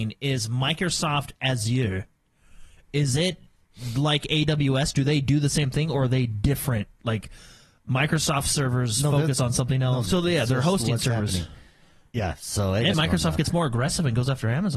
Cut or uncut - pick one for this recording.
cut